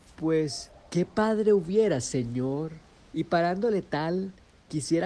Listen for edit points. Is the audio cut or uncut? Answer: cut